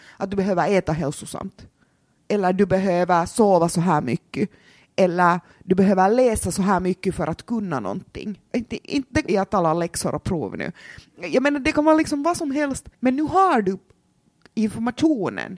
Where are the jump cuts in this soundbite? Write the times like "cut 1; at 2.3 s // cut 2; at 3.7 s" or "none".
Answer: cut 1; at 9.3 s // cut 2; at 12.9 s